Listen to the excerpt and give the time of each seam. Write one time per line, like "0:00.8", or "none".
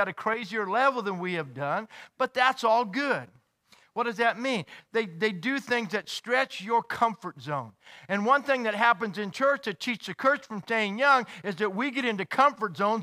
none